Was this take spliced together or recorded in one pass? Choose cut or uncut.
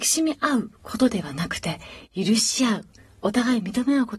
uncut